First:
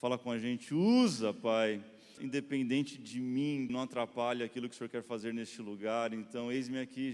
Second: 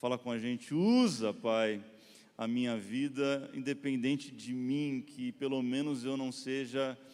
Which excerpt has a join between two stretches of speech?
first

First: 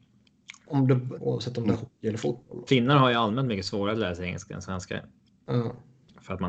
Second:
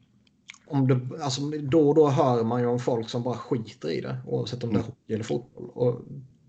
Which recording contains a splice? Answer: first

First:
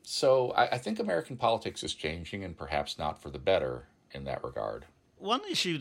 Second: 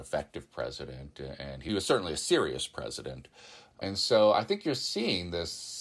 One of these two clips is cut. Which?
second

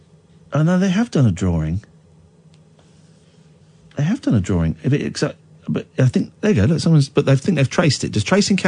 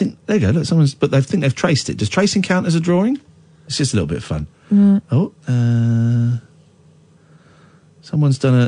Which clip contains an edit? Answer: second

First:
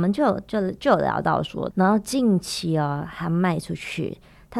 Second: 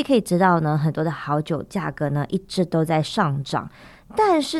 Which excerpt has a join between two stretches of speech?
first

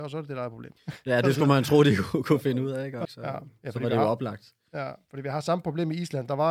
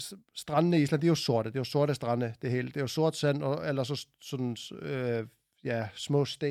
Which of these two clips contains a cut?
first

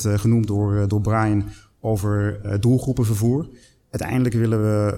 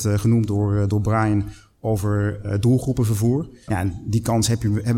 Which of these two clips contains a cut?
second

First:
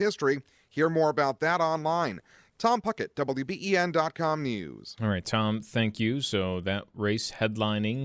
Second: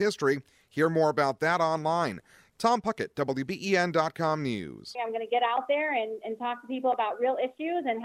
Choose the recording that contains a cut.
second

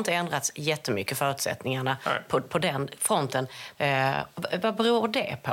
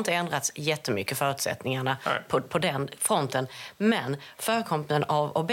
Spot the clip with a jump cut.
first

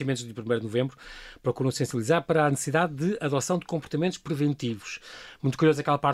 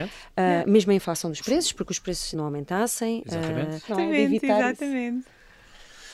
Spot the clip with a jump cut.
second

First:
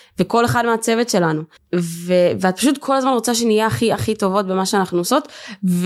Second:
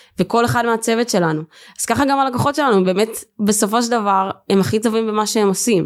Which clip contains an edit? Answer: first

